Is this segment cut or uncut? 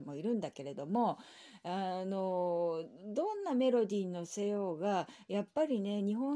uncut